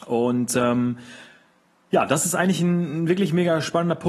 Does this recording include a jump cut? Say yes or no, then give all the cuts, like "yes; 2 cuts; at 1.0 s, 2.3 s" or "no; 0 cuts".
no; 0 cuts